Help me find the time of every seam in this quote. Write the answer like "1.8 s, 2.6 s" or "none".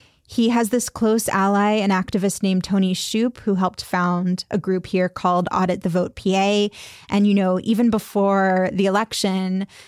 none